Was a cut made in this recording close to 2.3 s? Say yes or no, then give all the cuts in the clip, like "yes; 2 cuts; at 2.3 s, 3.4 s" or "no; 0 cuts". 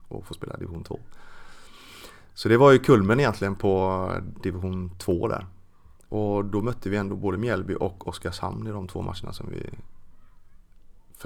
no; 1 cut; at 6.1 s